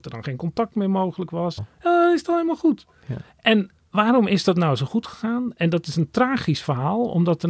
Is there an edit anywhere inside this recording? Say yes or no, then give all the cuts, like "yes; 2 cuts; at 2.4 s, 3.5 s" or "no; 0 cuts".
yes; 1 cut; at 1.6 s